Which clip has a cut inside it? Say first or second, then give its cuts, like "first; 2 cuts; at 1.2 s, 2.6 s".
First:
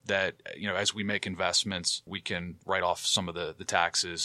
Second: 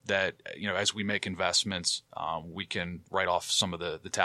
first; 1 cut; at 2.1 s